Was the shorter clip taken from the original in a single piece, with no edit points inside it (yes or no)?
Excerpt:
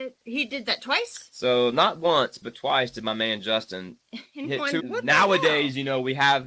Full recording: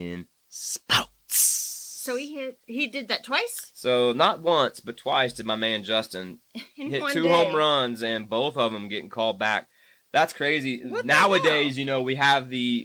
no